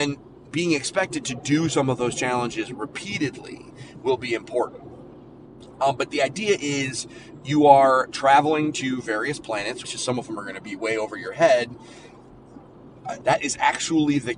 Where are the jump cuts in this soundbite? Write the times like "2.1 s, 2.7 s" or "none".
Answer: 9.8 s, 13.2 s